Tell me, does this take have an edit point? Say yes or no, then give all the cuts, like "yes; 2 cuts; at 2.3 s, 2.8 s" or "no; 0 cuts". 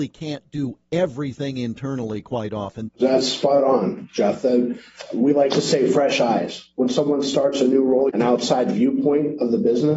yes; 2 cuts; at 2.9 s, 8.1 s